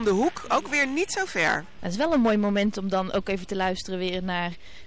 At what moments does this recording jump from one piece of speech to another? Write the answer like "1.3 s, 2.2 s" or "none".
1.8 s